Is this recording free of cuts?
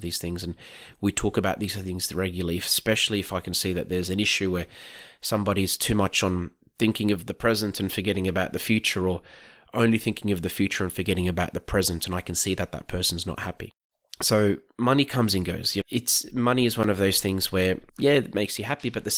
no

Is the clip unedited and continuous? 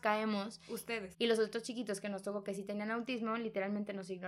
no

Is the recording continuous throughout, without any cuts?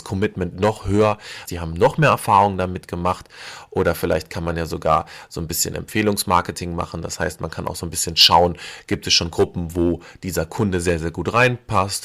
no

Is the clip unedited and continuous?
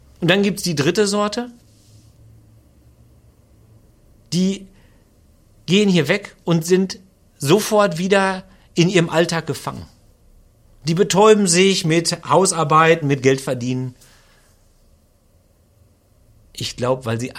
no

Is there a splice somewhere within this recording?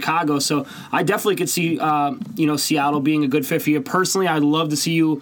no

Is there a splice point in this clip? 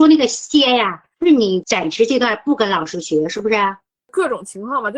no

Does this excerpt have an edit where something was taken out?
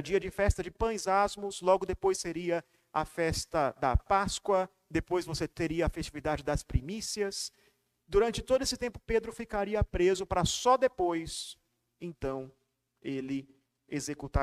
no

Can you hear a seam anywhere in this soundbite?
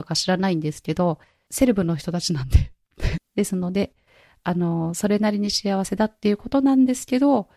yes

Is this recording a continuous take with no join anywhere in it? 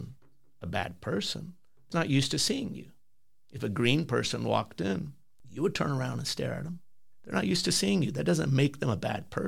no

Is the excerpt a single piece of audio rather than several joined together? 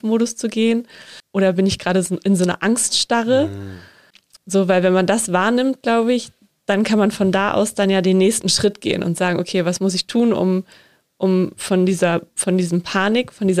no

